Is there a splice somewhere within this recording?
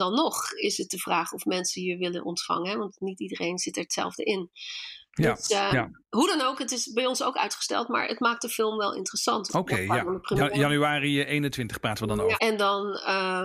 yes; 2 cuts; at 9.5 s, 12.4 s

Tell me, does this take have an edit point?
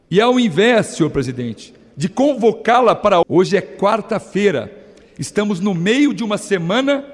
yes; 1 cut; at 3.2 s

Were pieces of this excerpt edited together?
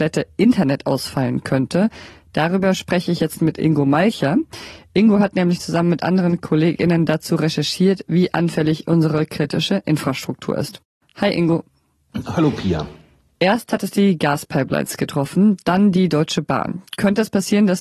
no; 0 cuts

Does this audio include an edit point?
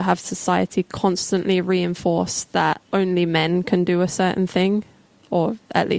yes; 1 cut; at 2.8 s

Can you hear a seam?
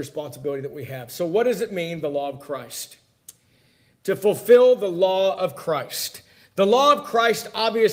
no; 0 cuts

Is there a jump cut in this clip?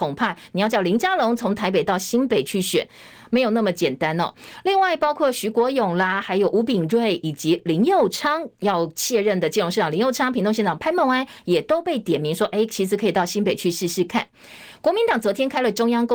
no; 0 cuts

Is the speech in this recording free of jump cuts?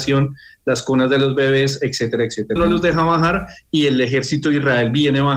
no; 1 cut; at 2.6 s

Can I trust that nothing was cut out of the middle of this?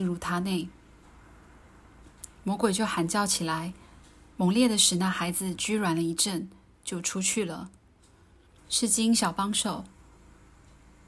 no; 1 cut; at 8.6 s

